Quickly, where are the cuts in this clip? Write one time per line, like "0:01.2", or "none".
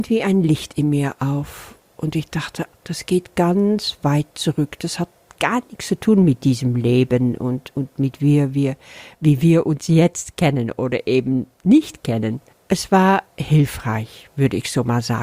0:02.7